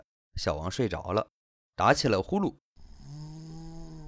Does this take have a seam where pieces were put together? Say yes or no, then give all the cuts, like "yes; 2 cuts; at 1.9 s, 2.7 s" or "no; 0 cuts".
no; 0 cuts